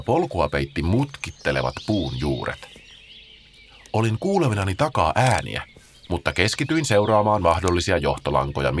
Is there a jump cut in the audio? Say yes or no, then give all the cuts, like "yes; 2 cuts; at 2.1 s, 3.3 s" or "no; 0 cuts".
no; 0 cuts